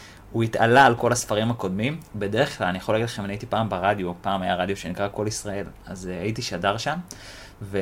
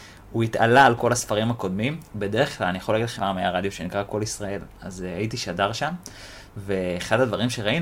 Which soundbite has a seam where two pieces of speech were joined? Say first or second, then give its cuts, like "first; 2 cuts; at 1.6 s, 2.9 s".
second; 1 cut; at 3.2 s